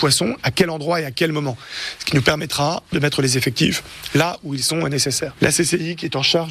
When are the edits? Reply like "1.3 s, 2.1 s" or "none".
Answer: none